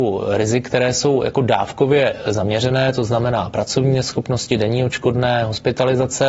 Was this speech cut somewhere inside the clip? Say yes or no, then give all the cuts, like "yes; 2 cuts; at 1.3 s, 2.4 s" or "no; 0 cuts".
no; 0 cuts